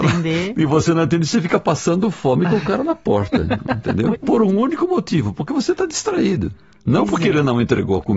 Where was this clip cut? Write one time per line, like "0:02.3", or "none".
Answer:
0:04.1